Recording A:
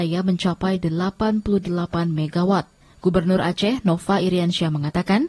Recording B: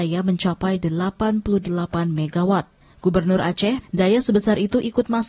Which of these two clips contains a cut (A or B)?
B